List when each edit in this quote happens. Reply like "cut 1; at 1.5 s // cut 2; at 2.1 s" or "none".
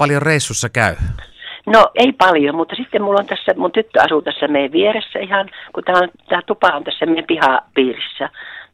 cut 1; at 1.9 s